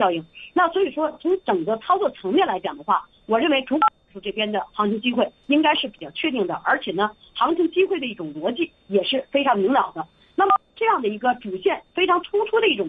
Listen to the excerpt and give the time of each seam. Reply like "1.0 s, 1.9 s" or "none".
none